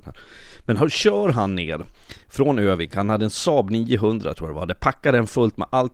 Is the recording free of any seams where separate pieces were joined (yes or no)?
yes